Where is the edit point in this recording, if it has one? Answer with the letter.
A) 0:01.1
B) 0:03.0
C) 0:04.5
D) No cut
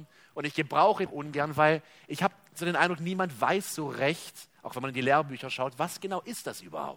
A